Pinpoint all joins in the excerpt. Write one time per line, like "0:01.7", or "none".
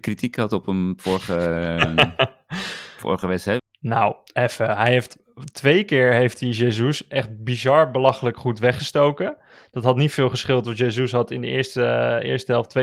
0:03.6